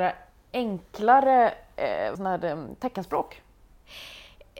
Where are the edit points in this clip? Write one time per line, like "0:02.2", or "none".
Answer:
0:02.2